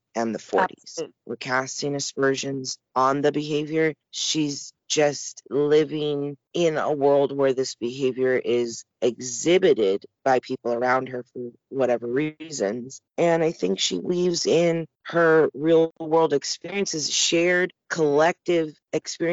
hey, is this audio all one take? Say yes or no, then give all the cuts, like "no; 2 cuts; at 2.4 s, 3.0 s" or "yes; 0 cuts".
no; 1 cut; at 1.2 s